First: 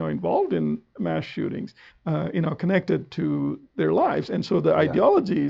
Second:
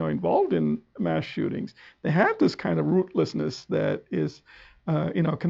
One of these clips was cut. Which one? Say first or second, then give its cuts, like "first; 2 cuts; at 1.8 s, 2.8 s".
first; 1 cut; at 1.9 s